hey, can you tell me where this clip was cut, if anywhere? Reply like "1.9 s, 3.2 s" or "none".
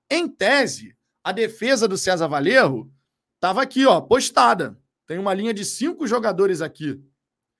none